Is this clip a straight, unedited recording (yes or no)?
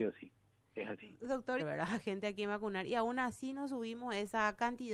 no